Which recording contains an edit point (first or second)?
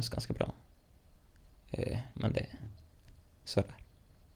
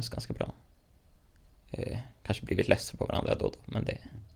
first